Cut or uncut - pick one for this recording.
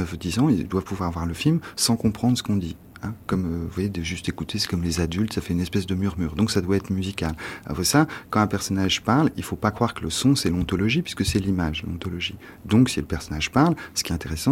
uncut